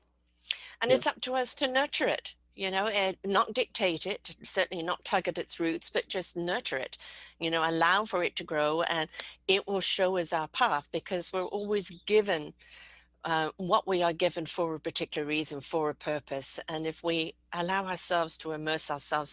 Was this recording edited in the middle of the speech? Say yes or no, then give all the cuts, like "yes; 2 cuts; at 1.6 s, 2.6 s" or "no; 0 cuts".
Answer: no; 0 cuts